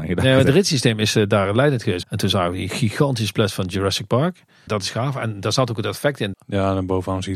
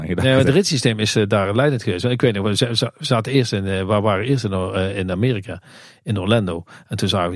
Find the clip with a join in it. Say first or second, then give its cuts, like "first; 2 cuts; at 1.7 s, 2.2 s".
first; 3 cuts; at 2.0 s, 4.7 s, 6.3 s